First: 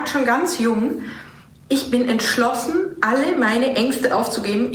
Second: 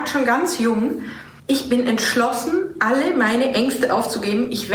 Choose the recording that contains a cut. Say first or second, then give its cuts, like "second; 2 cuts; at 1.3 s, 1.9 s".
second; 1 cut; at 1.4 s